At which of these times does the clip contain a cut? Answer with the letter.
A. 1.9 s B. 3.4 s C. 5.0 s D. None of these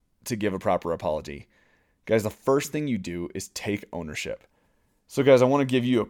C